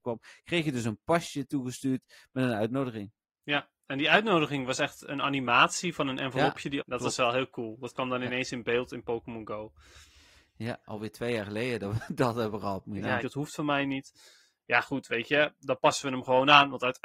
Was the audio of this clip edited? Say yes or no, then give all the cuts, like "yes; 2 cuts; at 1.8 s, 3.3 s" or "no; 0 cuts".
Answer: yes; 2 cuts; at 6.8 s, 13.2 s